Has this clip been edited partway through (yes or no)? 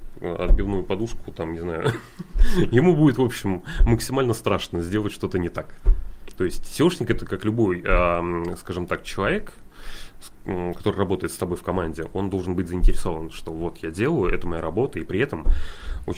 no